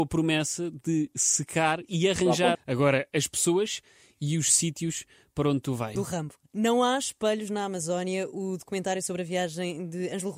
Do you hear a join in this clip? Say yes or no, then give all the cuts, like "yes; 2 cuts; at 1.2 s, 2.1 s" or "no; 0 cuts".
yes; 2 cuts; at 2.5 s, 6.0 s